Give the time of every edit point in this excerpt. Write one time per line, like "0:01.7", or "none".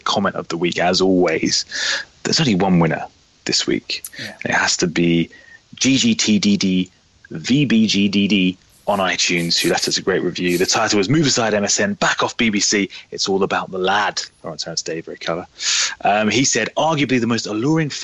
none